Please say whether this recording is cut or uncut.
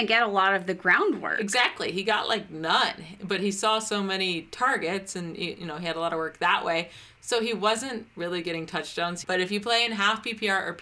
cut